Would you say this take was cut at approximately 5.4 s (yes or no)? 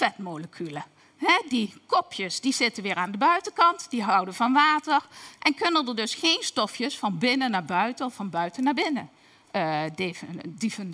yes